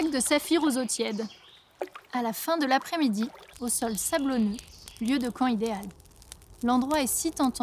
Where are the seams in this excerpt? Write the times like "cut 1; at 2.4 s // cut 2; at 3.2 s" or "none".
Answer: cut 1; at 3.5 s